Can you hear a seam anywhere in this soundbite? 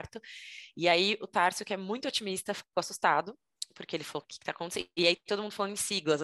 yes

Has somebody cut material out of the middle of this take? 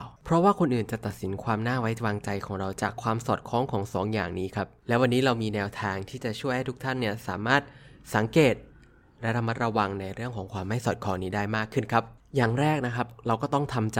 no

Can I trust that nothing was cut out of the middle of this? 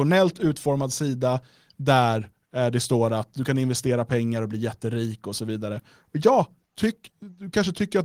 yes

